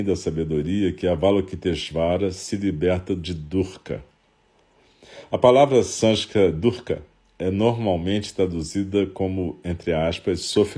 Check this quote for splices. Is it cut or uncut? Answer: uncut